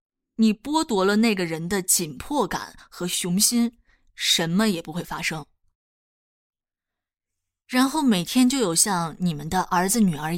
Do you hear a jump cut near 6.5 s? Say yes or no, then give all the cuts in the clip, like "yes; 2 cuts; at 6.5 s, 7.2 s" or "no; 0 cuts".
no; 0 cuts